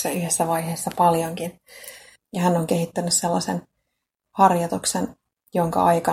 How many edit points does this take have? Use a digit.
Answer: 1